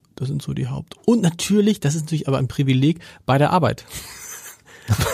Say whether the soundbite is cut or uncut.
uncut